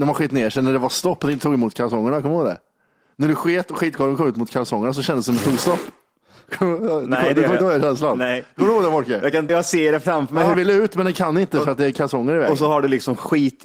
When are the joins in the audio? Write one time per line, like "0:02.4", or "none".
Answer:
0:09.5
0:10.5